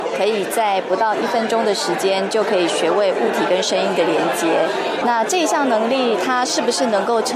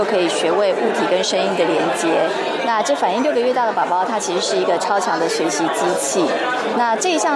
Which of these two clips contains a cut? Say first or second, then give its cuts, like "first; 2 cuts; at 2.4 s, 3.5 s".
first; 1 cut; at 5.0 s